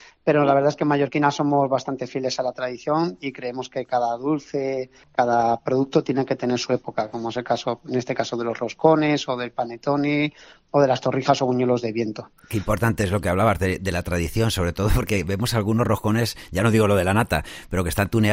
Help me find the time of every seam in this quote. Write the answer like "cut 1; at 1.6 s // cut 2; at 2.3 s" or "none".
none